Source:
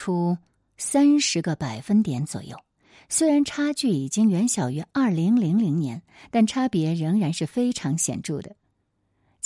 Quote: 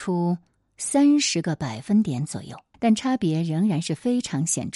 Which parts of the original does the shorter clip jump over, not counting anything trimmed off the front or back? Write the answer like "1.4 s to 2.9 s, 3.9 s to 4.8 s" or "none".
2.7 s to 6.3 s

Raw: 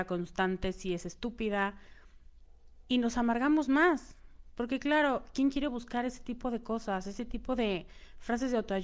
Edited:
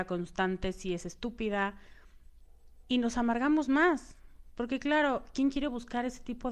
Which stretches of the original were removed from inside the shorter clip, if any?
none

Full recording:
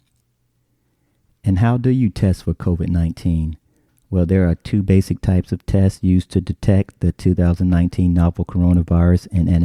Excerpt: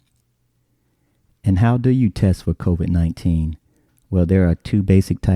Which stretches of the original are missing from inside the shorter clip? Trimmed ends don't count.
none

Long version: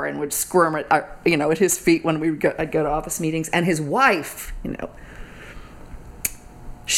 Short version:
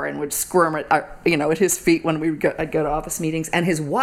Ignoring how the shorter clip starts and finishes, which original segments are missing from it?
none

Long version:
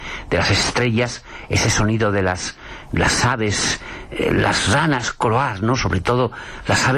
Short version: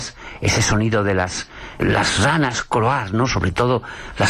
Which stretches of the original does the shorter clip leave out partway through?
2.9 s to 4.3 s

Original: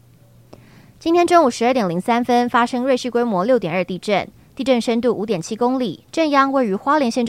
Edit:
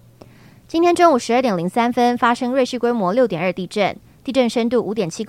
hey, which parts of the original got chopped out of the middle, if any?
none

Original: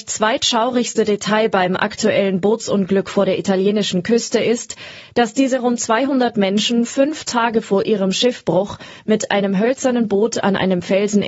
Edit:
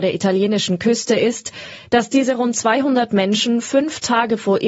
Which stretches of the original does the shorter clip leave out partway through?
none

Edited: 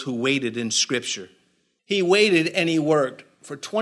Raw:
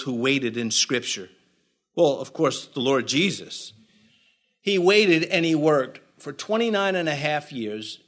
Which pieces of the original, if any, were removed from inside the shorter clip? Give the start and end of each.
1.8 s to 4.6 s

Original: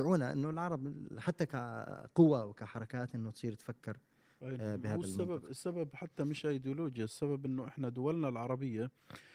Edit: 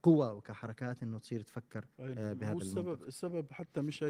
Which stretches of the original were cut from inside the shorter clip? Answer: 4.0 s to 4.4 s

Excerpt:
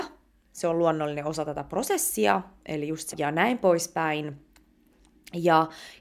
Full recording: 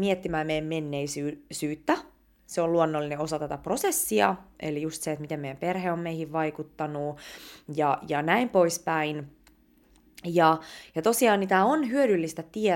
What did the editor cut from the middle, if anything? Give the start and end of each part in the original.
5.0 s to 8.0 s

